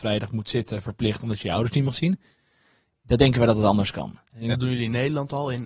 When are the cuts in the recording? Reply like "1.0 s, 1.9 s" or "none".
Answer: 4.5 s